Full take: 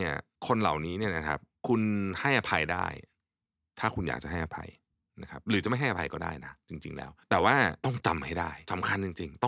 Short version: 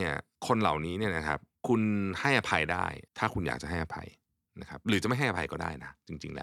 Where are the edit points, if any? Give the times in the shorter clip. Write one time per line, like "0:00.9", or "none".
0:03.1